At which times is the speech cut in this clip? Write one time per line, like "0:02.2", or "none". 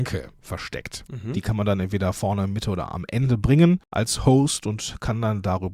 0:01.1